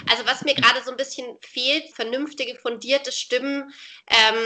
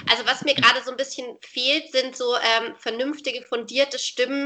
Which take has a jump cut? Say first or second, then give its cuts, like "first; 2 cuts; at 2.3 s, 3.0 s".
first; 1 cut; at 1.9 s